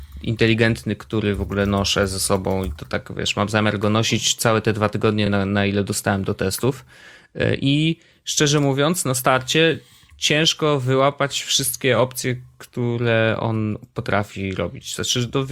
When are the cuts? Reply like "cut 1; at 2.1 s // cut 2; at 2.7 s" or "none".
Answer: none